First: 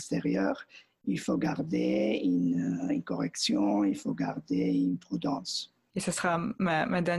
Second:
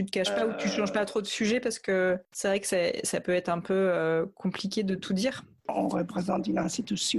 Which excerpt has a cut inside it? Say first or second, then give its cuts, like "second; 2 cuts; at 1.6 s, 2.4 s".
first; 1 cut; at 5.9 s